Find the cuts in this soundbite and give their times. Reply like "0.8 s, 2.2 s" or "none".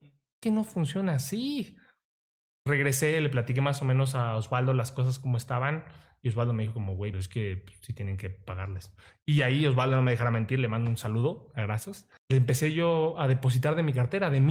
7.1 s, 12.2 s